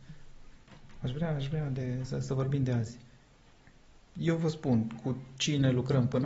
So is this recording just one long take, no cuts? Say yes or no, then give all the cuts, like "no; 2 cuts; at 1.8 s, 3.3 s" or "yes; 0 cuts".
yes; 0 cuts